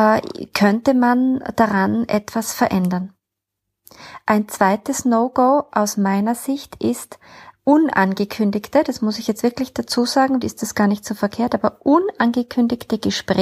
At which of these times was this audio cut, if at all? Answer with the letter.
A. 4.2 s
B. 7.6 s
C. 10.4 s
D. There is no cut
C